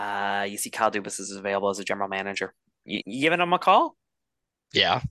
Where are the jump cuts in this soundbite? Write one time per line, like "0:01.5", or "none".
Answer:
0:03.0